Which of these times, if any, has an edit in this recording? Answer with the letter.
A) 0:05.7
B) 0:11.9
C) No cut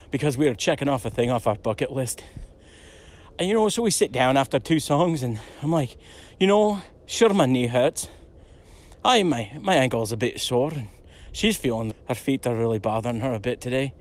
B